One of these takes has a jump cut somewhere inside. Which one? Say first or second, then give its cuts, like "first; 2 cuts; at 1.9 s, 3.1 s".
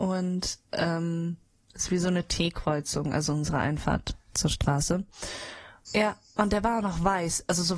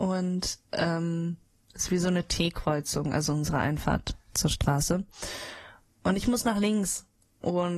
first; 1 cut; at 5.9 s